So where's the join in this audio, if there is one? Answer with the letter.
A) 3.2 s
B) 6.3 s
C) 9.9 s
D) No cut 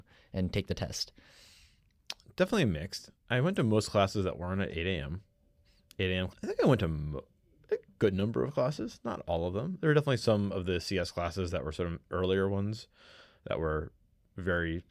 B